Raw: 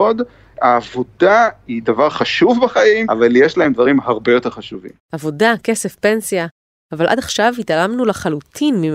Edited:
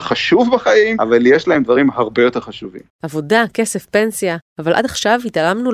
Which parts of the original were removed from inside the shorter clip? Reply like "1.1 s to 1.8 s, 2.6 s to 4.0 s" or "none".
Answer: 6.6 s to 6.8 s